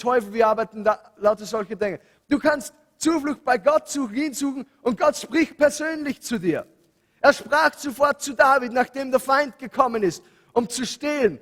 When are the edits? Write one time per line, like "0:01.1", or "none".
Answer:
0:02.2